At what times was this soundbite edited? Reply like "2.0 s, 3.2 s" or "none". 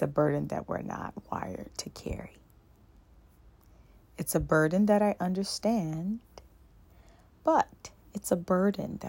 none